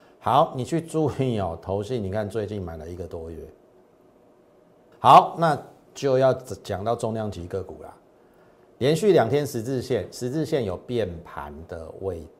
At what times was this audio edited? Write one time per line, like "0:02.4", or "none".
0:04.9